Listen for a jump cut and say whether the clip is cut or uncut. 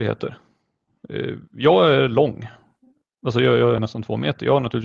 uncut